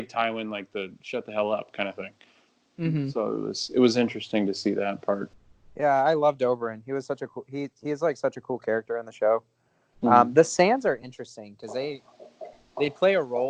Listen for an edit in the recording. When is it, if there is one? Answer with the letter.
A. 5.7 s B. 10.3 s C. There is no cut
C